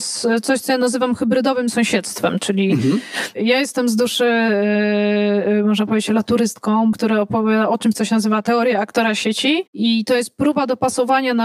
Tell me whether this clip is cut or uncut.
cut